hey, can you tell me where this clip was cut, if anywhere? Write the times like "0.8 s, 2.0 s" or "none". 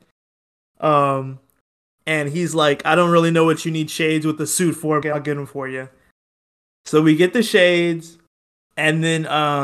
5.0 s